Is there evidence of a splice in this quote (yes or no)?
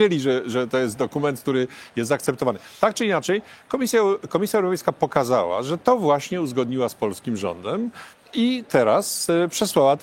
no